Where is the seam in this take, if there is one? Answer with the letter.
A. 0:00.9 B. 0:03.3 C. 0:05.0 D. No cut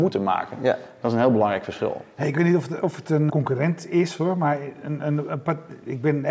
B